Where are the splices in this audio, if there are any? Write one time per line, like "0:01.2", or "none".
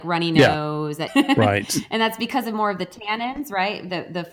0:01.1